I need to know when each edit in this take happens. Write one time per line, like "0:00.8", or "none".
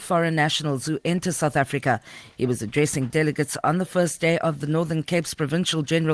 none